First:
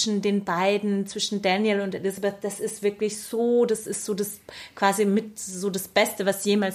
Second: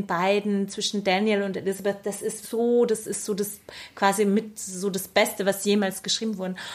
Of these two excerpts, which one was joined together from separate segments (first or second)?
second